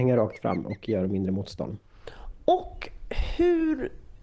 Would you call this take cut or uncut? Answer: uncut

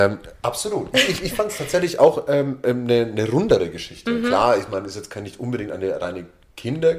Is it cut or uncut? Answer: uncut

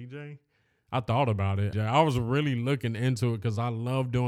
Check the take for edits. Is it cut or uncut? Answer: cut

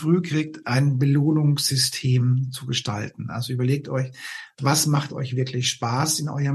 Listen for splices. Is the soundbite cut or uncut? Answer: uncut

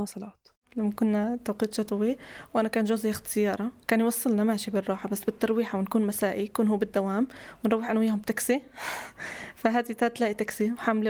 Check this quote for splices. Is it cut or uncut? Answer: uncut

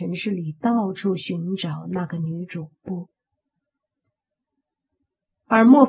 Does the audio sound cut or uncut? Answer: uncut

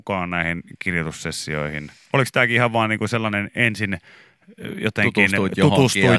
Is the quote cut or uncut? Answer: uncut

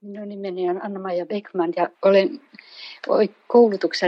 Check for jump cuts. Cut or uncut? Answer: cut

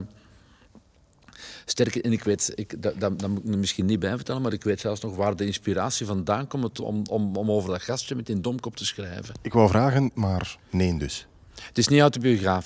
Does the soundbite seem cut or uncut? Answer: cut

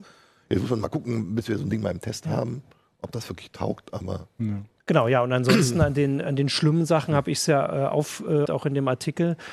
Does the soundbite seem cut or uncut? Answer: cut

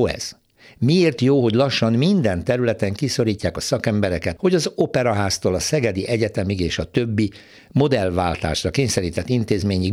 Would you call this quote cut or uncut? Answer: cut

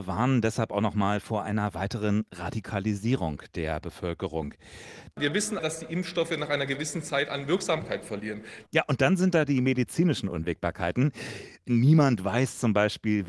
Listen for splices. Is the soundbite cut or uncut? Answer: cut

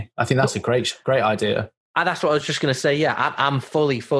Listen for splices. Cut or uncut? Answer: uncut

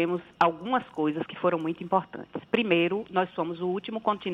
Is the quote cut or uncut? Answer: uncut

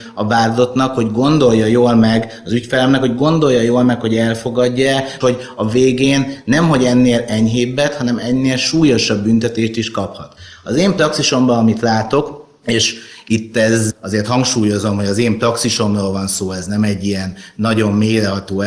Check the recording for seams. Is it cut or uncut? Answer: cut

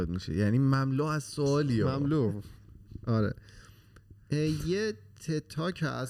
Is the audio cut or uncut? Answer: uncut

